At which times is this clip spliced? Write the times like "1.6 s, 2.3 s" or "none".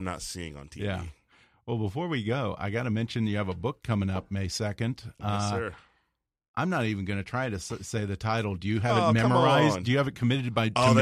none